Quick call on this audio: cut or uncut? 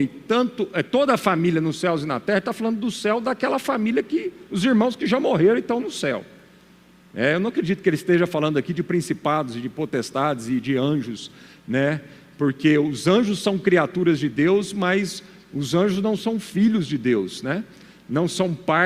uncut